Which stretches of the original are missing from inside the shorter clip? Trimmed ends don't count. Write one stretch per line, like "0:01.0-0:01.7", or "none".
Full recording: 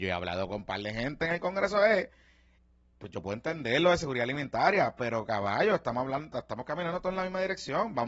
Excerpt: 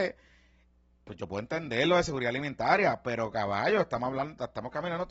none